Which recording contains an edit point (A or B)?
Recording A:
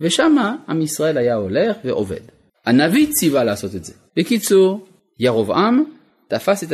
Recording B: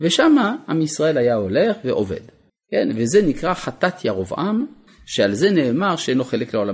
A